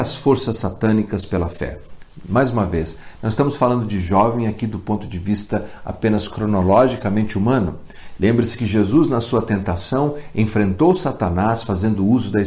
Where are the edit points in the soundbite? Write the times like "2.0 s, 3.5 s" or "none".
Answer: 8.2 s